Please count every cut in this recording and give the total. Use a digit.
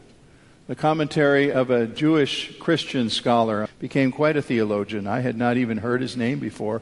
1